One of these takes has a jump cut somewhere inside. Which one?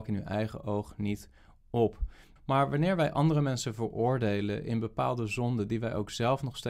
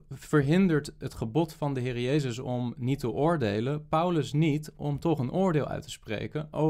first; 1 cut; at 2.4 s

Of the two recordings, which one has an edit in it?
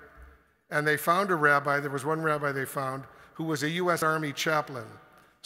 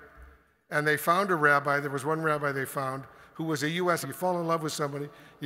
second; 1 cut; at 4.0 s

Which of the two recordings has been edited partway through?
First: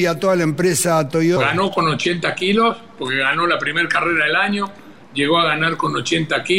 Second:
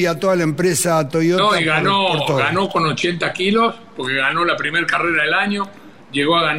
first; 1 cut; at 1.4 s

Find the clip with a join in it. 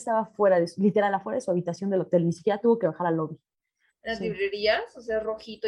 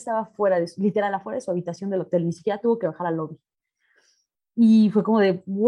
first; 1 cut; at 3.9 s

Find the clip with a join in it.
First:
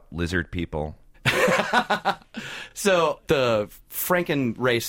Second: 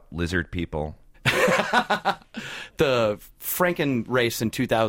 second; 1 cut; at 2.7 s

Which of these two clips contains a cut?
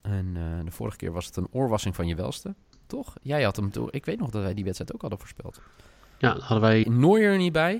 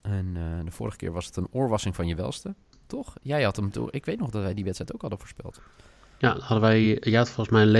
first; 1 cut; at 6.8 s

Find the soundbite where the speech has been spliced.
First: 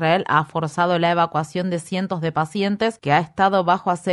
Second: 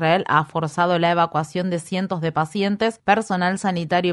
first; 1 cut; at 3.0 s

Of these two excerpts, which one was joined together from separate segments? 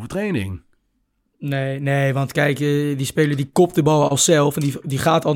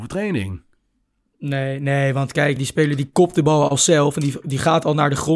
second; 1 cut; at 2.6 s

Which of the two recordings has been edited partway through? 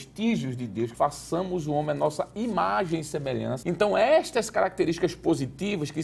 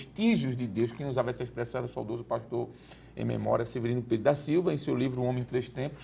first; 2 cuts; at 0.9 s, 3.6 s

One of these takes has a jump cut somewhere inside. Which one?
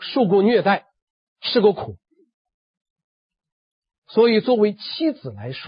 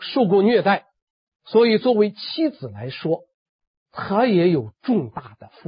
second; 1 cut; at 1.3 s

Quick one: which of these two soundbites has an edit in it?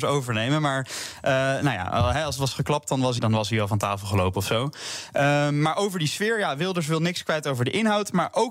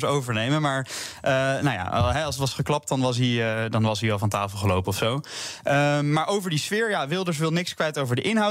first; 1 cut; at 3.2 s

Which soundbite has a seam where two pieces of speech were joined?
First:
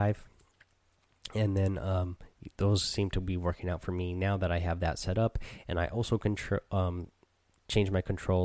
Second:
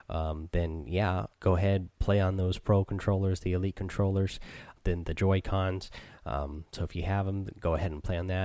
second; 2 cuts; at 1.3 s, 4.8 s

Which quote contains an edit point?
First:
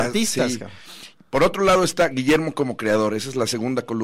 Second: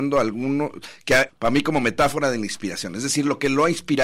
second; 1 cut; at 1.3 s

